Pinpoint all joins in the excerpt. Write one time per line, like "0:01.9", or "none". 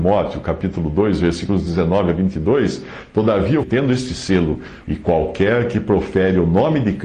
0:03.6
0:04.8